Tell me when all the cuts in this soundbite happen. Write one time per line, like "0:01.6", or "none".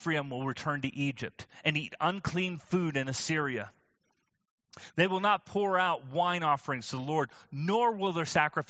none